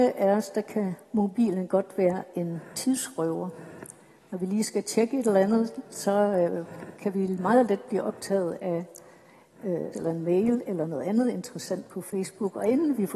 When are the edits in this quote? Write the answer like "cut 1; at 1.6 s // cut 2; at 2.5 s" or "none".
cut 1; at 9.9 s